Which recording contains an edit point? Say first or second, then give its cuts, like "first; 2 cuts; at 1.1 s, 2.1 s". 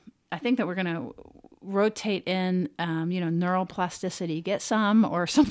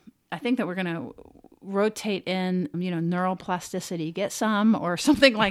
second; 1 cut; at 2.7 s